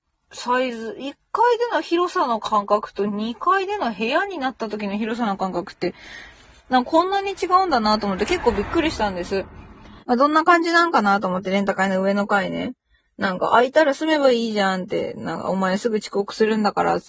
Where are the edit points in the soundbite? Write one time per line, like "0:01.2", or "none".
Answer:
0:10.0